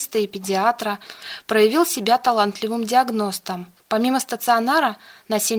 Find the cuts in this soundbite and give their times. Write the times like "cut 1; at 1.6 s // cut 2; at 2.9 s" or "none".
cut 1; at 3.8 s